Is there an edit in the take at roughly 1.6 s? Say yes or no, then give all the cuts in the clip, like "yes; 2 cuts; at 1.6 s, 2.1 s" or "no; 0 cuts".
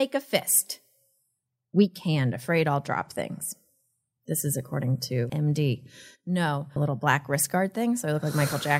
no; 2 cuts; at 5.3 s, 6.8 s